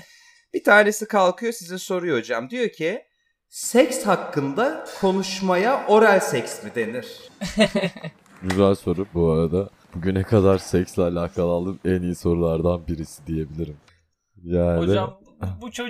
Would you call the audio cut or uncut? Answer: cut